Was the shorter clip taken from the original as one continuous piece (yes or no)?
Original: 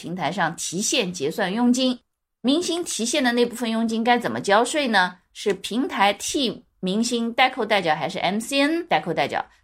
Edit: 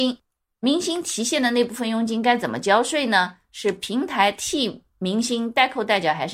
yes